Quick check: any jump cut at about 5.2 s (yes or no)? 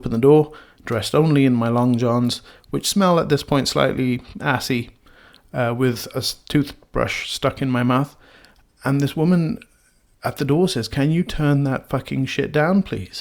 no